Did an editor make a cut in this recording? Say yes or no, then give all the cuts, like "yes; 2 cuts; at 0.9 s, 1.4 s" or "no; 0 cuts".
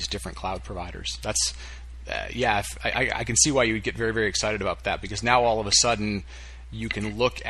no; 0 cuts